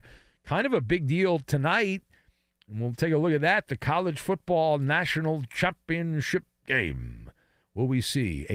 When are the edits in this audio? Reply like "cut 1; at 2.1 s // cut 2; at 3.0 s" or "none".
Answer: none